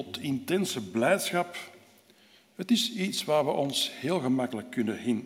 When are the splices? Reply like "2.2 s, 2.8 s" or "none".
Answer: none